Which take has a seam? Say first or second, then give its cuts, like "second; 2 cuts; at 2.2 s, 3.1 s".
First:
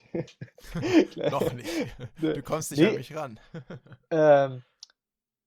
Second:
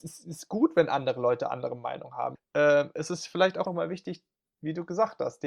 second; 2 cuts; at 2.4 s, 3.7 s